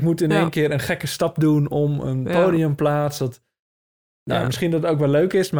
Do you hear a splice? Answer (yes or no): no